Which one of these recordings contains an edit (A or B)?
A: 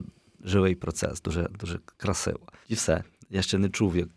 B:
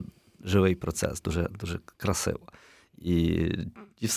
A